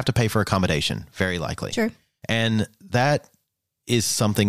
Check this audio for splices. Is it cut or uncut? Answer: uncut